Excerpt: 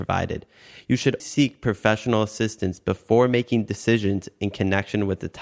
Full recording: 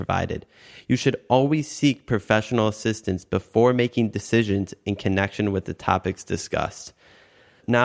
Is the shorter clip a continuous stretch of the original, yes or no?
no